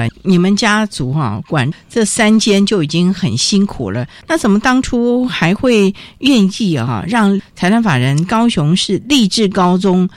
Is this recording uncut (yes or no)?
no